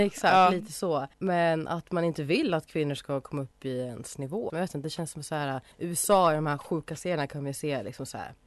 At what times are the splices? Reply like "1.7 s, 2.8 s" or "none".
1.1 s, 4.5 s, 5.7 s

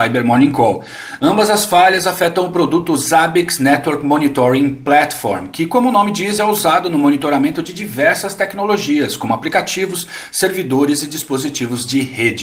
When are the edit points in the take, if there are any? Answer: none

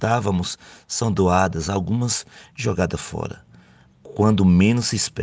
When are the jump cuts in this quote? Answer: none

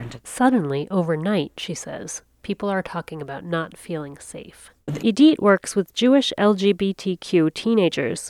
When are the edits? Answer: 5.0 s

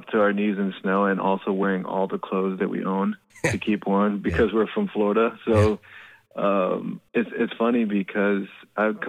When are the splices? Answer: 7.1 s

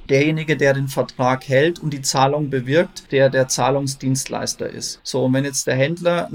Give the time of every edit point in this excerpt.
3.1 s

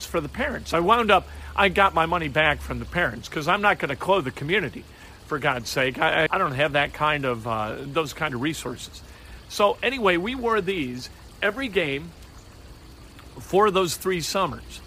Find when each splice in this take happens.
6.3 s

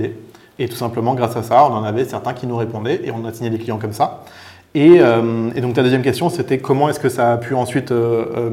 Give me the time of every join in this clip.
none

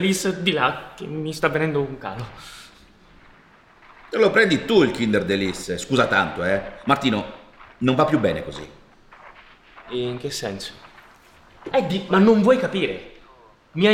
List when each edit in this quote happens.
11.7 s

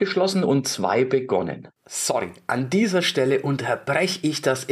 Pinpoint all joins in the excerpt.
1.8 s

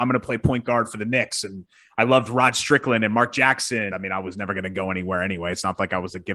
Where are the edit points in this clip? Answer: 3.9 s

